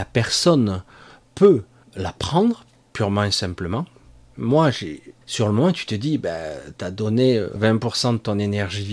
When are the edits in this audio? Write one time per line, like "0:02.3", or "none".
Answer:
0:01.8
0:05.2
0:07.6